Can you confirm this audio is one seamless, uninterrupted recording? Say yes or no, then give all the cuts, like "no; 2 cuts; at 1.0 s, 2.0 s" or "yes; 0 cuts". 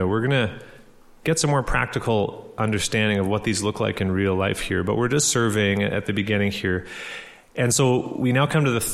yes; 0 cuts